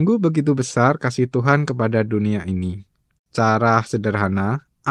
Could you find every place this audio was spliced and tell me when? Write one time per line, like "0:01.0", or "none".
0:03.2